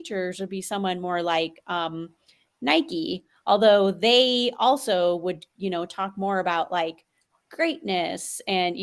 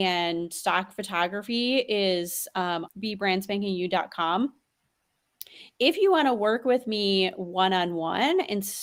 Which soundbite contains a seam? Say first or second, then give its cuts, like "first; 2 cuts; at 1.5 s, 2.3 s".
second; 1 cut; at 2.9 s